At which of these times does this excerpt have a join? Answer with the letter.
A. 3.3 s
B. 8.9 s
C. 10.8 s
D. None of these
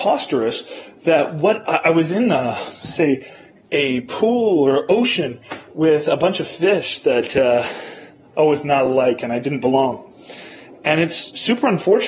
D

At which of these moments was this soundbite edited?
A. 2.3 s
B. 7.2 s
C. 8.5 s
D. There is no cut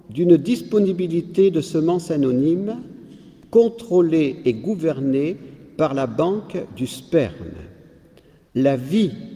C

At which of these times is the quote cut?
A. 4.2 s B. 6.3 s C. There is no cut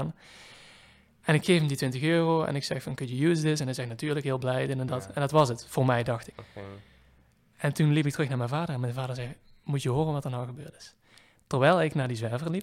B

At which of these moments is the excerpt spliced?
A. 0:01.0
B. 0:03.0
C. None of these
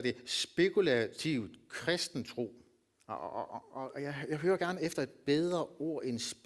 B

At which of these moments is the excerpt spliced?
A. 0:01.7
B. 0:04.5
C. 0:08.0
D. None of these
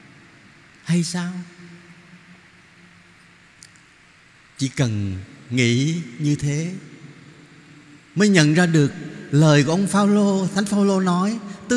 D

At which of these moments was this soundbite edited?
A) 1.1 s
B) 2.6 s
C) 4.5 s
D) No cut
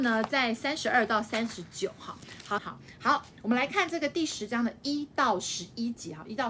B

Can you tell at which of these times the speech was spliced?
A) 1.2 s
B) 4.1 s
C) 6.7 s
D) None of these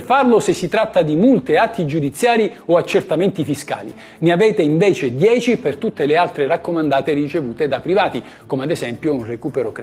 D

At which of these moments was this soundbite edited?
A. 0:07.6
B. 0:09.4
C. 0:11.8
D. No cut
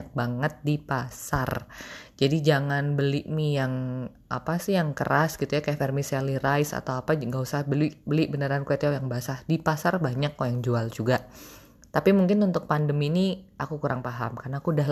D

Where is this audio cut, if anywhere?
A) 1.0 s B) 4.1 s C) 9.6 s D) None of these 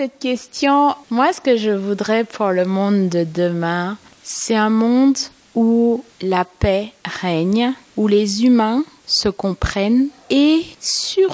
A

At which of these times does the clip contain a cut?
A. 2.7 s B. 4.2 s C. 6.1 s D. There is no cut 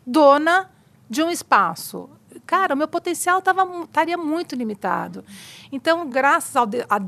D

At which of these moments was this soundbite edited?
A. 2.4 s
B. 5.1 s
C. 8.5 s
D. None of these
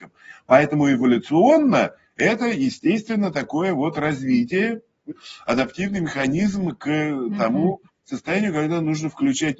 B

